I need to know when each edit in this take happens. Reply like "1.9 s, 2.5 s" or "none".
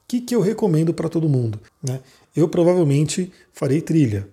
1.7 s